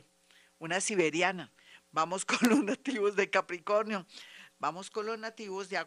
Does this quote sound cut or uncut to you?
cut